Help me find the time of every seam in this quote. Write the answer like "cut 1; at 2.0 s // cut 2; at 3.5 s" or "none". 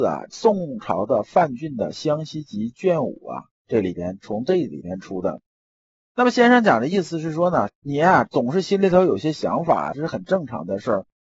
cut 1; at 9.9 s